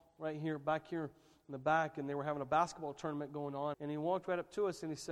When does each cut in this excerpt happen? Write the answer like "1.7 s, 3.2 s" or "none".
3.7 s